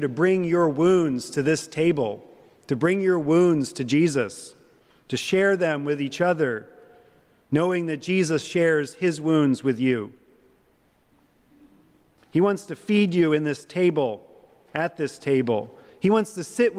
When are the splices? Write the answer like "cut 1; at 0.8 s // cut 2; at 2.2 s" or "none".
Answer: cut 1; at 12.2 s